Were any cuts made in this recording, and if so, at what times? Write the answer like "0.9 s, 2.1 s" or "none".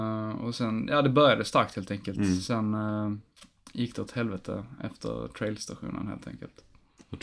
none